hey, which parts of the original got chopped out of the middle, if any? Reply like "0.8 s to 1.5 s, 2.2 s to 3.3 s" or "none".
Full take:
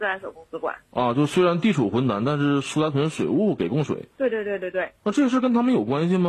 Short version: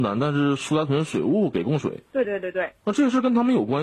4.3 s to 4.4 s